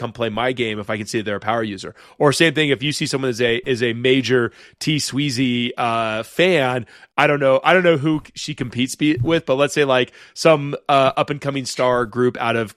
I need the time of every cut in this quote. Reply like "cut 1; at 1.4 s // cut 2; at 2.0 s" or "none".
none